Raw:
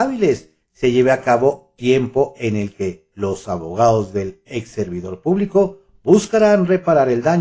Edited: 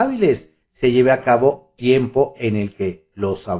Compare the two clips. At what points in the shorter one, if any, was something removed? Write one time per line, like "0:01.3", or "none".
none

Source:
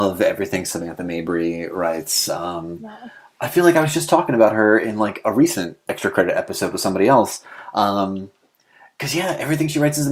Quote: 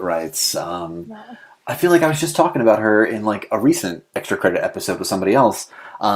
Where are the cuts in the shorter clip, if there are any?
none

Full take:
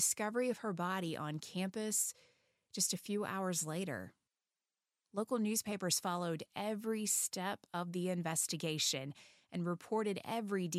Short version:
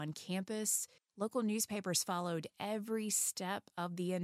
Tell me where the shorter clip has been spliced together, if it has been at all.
0:01.0

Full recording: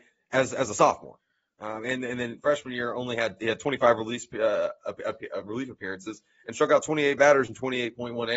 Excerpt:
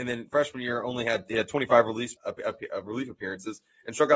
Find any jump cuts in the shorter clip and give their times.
0:02.2

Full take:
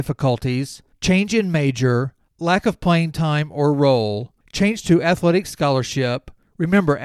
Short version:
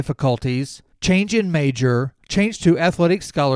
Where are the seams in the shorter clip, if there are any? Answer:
0:02.2

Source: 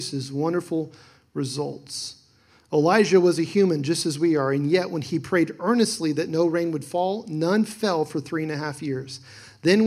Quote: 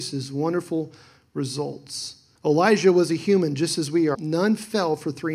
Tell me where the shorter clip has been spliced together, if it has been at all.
0:02.4
0:04.1

